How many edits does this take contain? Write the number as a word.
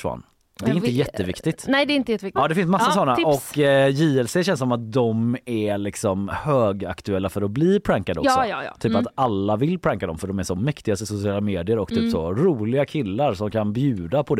one